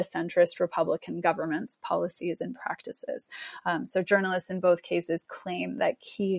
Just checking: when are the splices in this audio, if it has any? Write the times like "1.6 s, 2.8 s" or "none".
none

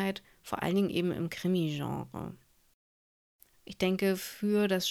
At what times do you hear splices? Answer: 3.5 s

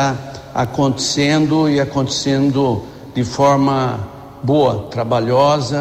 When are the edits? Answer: none

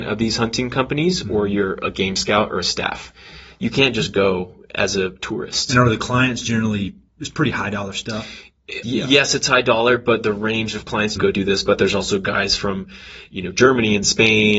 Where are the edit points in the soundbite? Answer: 8.8 s, 11.2 s

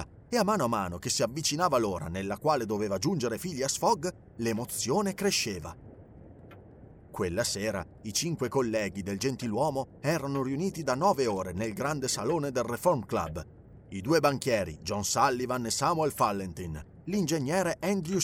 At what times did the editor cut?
none

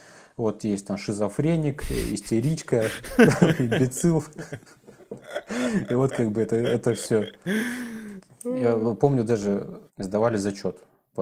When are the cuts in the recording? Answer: 9.9 s

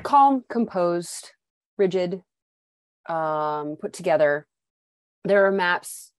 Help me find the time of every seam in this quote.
none

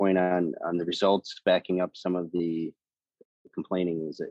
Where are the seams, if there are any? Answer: none

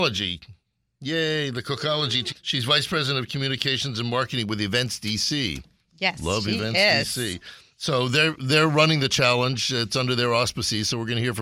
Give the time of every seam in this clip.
2.3 s

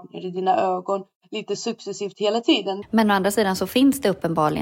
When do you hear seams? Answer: 2.8 s

